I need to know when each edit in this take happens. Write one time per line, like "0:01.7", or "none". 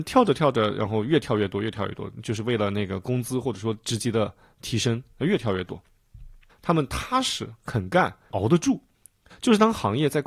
0:06.5